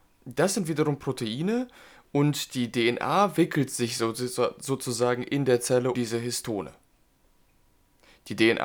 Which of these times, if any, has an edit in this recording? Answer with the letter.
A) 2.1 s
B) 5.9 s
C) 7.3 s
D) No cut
B